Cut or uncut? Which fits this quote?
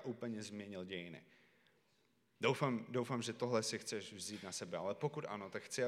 uncut